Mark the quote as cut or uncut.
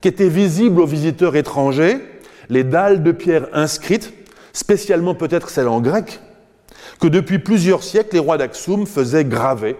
uncut